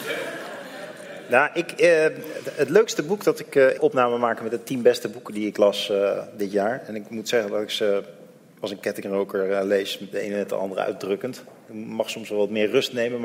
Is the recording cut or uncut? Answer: cut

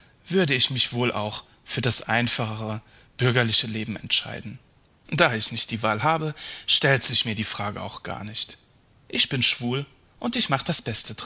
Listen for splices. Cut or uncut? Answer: uncut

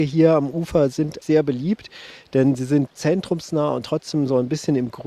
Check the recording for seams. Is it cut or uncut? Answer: cut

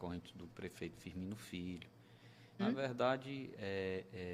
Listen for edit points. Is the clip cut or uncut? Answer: cut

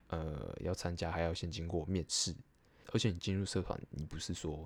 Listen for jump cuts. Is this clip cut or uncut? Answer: cut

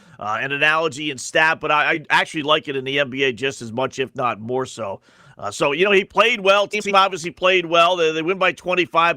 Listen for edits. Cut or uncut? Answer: uncut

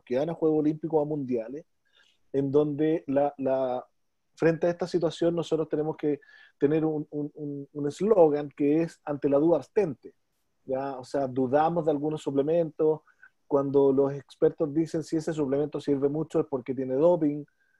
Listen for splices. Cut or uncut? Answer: uncut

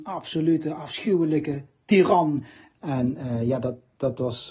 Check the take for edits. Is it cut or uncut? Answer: cut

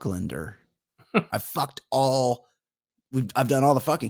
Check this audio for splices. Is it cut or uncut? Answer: cut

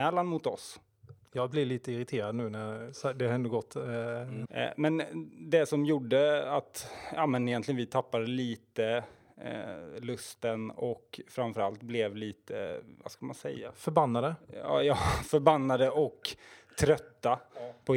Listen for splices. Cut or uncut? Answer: cut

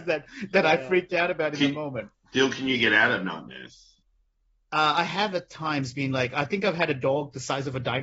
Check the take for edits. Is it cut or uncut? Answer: uncut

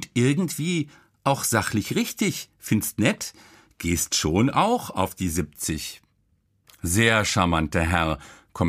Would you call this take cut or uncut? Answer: uncut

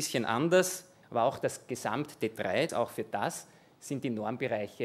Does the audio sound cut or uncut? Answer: cut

